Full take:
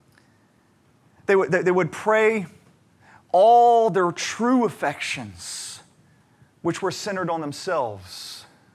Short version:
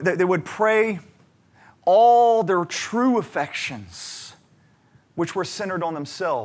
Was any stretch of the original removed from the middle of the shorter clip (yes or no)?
no